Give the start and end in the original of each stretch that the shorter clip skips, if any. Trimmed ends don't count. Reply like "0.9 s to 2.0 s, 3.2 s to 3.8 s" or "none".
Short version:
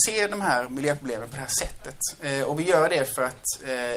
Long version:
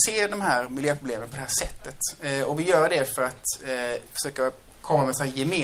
none

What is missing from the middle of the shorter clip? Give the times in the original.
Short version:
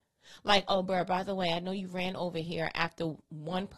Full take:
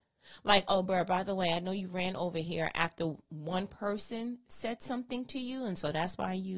none

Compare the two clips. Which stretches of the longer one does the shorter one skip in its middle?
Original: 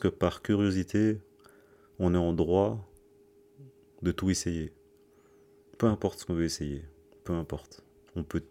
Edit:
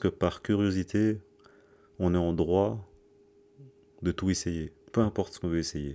4.8 s to 5.7 s

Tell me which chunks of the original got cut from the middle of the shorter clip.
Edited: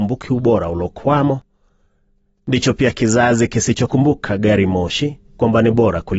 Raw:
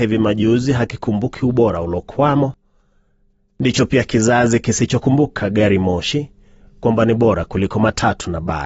6.4 s to 6.7 s

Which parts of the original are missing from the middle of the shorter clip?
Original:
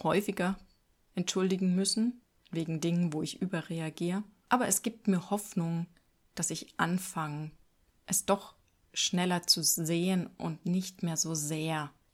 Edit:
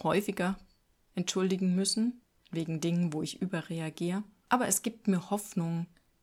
none

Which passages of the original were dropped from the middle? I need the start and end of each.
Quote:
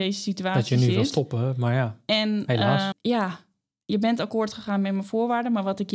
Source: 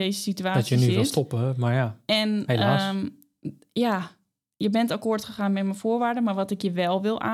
2.9 s to 3.6 s

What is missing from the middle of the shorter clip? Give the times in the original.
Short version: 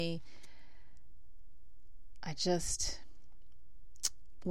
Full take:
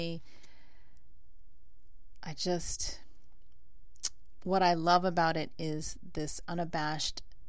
none

